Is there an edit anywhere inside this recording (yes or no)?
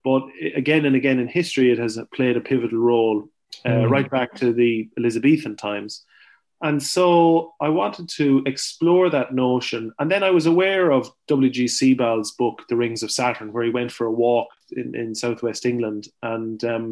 no